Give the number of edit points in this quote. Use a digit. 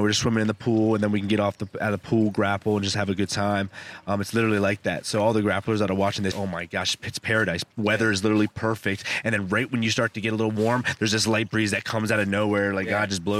1